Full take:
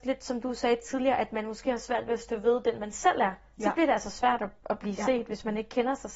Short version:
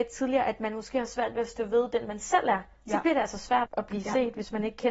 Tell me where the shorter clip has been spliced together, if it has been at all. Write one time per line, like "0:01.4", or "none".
0:03.7